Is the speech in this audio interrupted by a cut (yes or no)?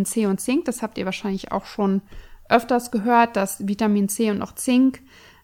no